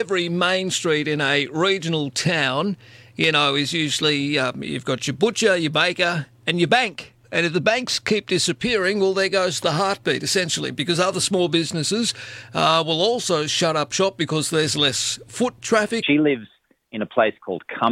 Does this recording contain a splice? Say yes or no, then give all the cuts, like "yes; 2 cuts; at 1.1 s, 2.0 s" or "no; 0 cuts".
yes; 2 cuts; at 7.2 s, 16.0 s